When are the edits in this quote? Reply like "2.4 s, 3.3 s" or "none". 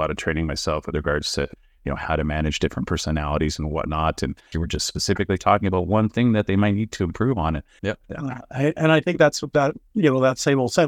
4.5 s, 7.8 s